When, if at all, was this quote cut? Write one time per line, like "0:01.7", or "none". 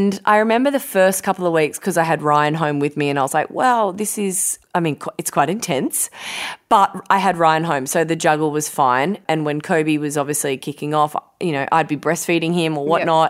none